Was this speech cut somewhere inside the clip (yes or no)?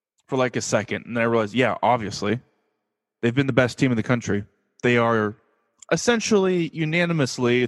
no